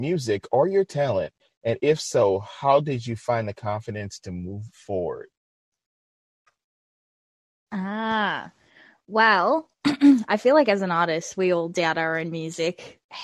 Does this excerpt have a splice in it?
no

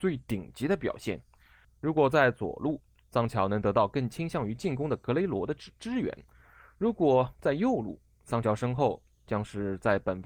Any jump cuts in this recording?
yes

